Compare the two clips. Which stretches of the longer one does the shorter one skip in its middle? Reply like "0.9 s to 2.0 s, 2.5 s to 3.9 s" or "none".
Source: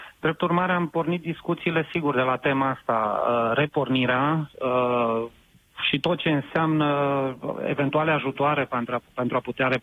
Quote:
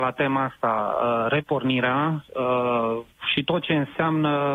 5.4 s to 5.7 s